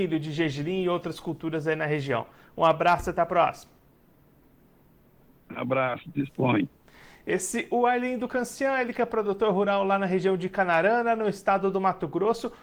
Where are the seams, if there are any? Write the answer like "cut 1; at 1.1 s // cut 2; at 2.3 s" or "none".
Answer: none